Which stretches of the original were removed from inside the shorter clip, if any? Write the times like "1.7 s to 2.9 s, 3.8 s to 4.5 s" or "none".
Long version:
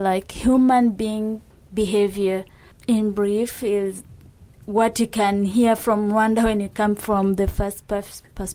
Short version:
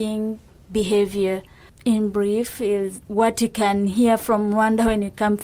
4.1 s to 4.6 s

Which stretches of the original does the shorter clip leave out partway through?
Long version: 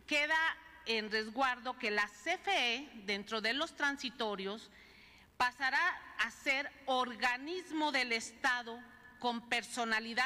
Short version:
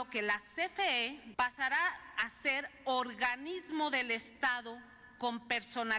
3.0 s to 5.4 s

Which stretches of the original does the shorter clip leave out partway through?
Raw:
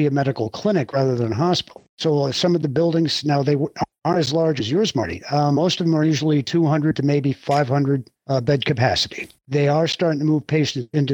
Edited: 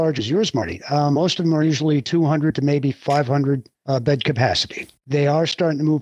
none

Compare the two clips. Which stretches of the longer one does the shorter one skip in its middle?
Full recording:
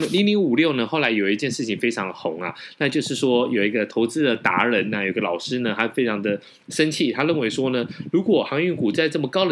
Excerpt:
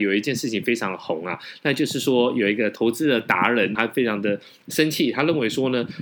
4.9 s to 5.8 s

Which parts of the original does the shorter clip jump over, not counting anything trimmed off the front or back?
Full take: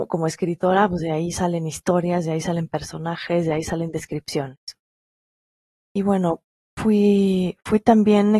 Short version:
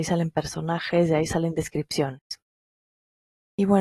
none

